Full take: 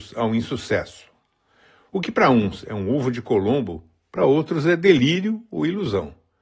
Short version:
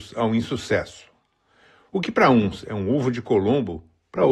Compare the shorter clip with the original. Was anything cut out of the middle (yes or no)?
no